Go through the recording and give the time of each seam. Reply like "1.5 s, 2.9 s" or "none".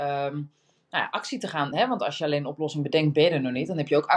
none